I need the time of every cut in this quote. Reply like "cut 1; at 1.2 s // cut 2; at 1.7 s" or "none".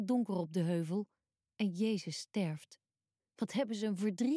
cut 1; at 3.2 s